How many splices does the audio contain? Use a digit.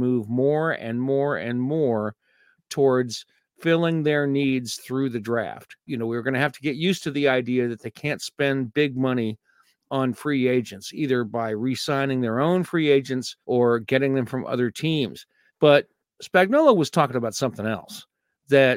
3